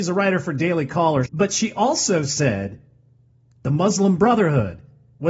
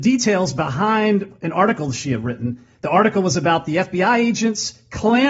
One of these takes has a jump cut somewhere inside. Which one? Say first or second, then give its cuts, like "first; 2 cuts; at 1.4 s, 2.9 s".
first; 1 cut; at 1.2 s